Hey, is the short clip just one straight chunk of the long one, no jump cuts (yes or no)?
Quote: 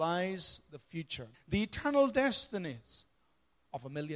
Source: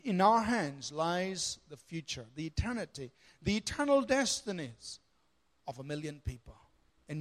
no